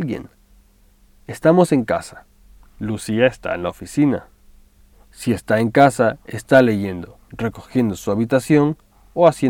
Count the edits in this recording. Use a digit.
1